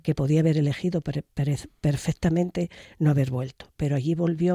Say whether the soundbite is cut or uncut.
uncut